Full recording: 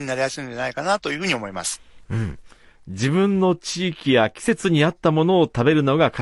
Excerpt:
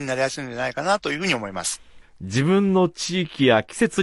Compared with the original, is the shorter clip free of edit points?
no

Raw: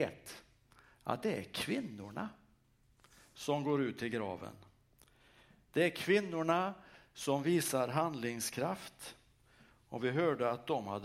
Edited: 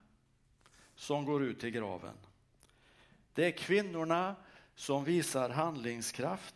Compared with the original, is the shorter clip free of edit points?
yes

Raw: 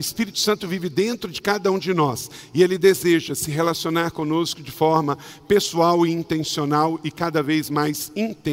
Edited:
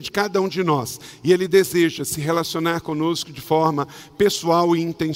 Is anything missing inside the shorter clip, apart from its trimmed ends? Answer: no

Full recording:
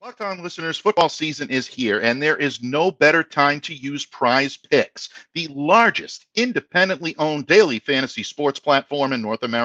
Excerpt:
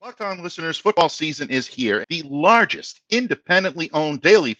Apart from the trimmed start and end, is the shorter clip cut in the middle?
yes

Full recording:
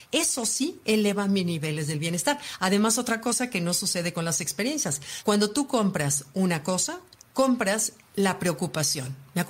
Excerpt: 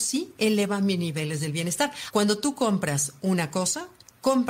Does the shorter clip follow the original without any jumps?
no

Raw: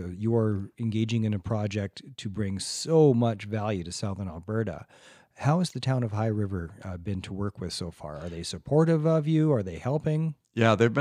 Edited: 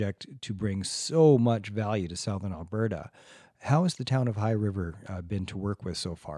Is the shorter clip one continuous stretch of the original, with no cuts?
yes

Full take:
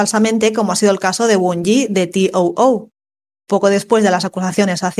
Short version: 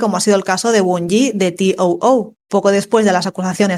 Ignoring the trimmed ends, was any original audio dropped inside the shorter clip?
yes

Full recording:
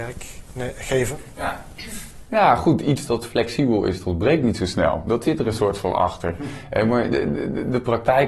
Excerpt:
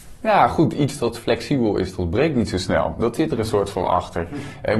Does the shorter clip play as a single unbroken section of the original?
yes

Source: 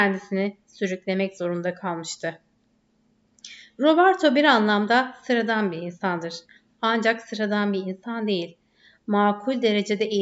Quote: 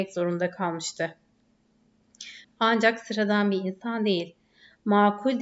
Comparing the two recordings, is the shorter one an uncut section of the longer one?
no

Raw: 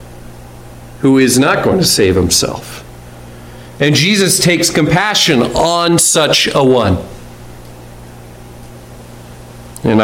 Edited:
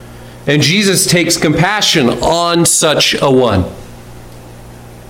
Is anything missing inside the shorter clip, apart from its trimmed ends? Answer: no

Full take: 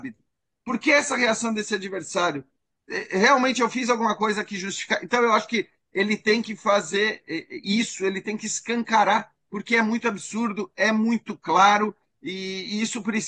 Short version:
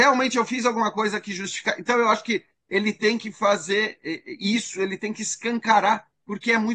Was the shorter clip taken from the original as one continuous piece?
yes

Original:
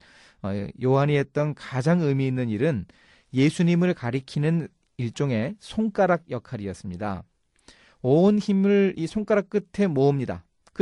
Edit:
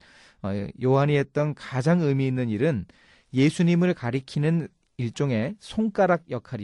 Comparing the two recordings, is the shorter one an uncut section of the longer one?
yes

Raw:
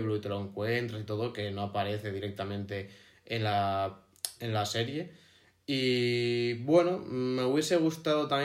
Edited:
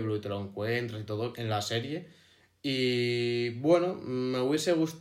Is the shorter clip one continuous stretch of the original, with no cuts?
no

